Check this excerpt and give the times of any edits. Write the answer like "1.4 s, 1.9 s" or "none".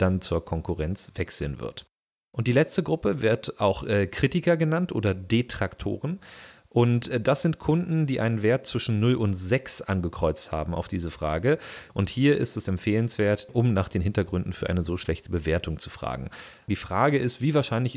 11.9 s, 13.5 s, 16.7 s

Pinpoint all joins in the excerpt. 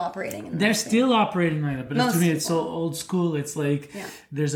none

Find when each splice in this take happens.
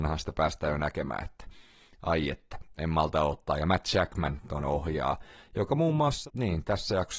none

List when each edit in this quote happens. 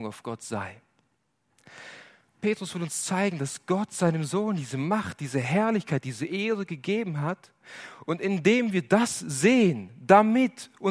none

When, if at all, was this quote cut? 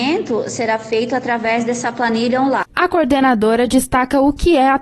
none

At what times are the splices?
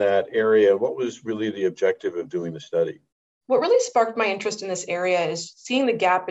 none

